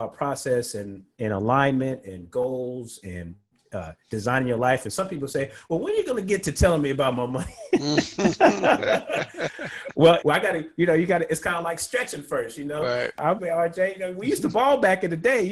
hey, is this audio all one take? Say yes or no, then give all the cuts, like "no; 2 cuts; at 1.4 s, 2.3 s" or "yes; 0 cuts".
no; 2 cuts; at 10.2 s, 13.4 s